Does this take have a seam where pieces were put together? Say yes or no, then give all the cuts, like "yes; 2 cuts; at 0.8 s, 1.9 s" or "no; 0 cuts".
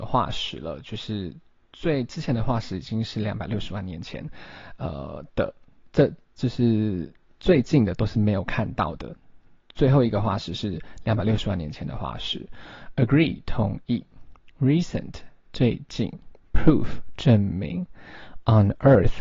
no; 0 cuts